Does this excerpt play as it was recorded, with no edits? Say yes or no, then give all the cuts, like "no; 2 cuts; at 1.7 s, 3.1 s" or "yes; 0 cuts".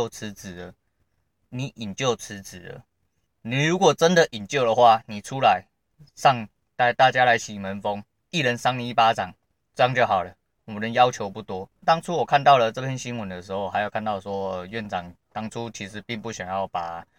no; 2 cuts; at 3.3 s, 11.8 s